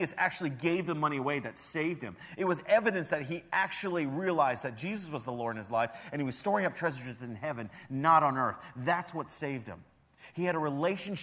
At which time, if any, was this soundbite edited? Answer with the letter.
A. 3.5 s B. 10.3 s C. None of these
C